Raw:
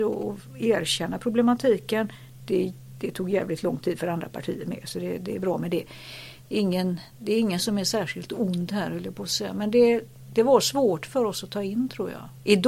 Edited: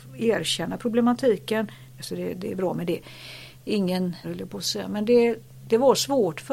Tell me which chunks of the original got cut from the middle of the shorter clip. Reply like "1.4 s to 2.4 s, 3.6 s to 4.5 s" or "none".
2.4 s to 4.8 s, 7.1 s to 8.9 s